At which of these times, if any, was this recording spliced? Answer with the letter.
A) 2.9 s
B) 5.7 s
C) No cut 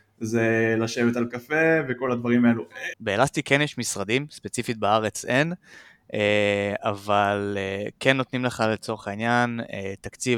A